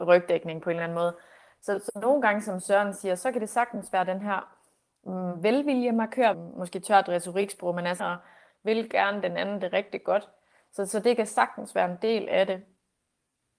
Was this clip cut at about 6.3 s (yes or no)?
yes